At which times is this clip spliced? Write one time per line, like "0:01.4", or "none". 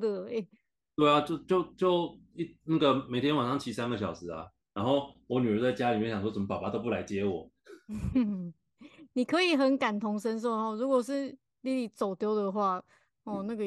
none